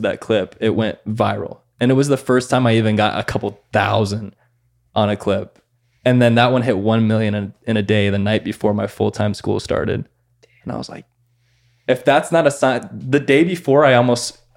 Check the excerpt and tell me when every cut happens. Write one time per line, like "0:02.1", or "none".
none